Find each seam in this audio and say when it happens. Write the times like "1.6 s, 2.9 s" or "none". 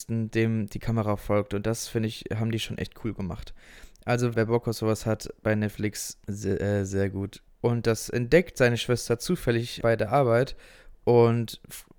4.3 s, 7.5 s, 9.8 s